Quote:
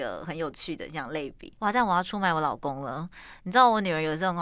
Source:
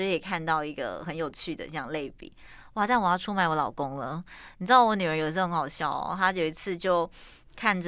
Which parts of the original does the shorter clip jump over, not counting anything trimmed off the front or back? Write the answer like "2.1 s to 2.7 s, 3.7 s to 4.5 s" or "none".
2.4 s to 2.7 s